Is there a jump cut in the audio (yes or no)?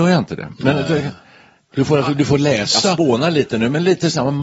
no